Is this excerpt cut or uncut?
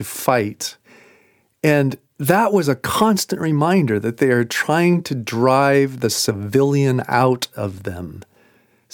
uncut